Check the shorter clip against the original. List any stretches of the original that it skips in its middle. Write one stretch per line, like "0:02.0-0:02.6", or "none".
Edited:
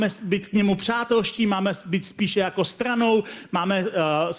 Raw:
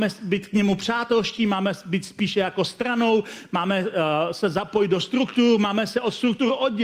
none